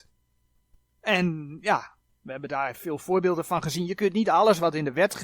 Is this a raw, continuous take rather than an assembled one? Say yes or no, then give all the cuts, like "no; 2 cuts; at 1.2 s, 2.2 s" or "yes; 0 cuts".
no; 1 cut; at 0.9 s